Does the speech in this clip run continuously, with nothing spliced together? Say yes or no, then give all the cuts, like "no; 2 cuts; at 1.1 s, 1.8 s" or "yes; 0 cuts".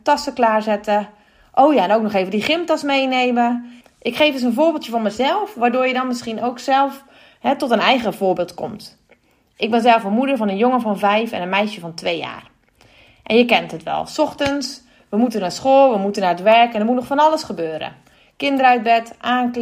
no; 1 cut; at 3.8 s